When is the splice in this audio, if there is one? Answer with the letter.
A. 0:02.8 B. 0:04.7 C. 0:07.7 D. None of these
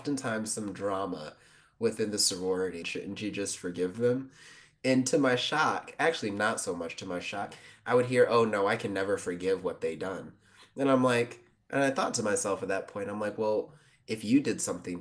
A